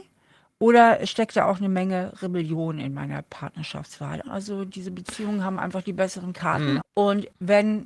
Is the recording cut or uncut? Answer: cut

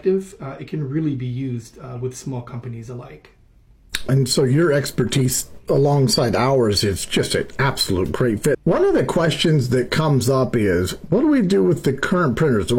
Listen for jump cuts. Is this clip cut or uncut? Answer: cut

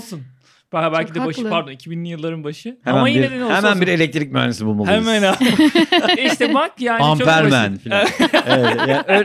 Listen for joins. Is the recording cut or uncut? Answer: uncut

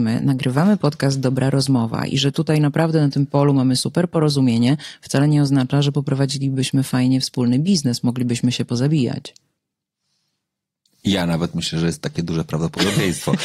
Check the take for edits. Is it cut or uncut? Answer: uncut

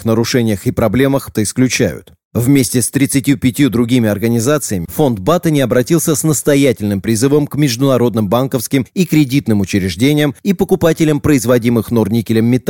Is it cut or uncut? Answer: cut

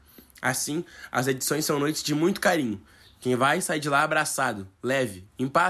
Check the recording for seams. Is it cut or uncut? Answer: uncut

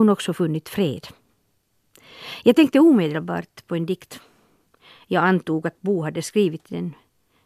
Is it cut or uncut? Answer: uncut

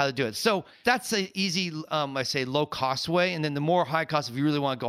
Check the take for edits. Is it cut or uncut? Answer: uncut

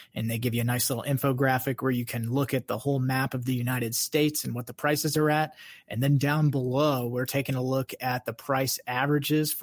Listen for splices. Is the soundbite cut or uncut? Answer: uncut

